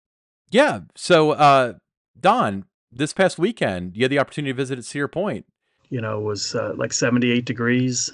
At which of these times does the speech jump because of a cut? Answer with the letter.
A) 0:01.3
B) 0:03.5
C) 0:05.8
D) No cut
C